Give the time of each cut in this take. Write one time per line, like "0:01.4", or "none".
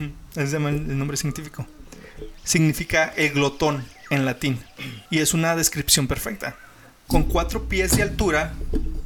0:05.1